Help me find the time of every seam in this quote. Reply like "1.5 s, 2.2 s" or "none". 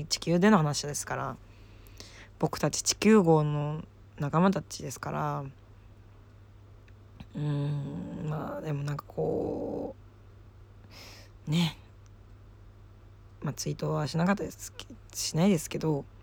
14.5 s